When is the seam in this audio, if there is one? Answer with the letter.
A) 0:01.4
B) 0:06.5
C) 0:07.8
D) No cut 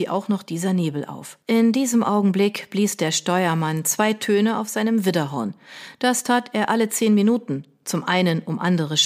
A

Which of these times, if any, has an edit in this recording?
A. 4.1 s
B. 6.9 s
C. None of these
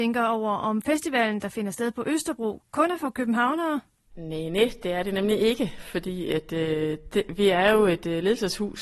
C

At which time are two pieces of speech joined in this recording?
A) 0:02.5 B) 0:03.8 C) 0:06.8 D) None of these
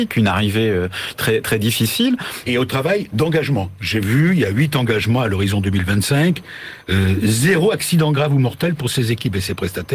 A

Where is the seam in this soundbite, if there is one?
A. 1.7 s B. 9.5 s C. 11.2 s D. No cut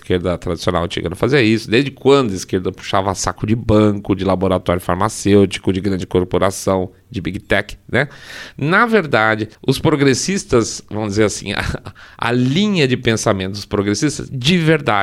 B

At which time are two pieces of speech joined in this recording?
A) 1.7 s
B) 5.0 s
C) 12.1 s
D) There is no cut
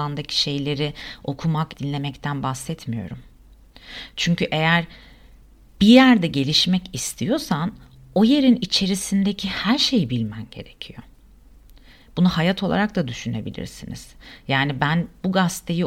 A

